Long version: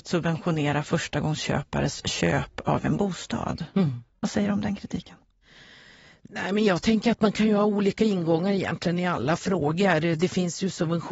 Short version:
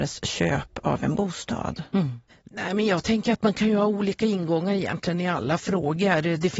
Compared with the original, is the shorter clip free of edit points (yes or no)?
no